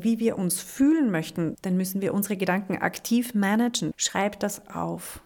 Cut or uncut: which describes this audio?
cut